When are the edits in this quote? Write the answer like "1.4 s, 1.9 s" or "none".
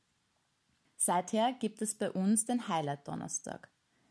none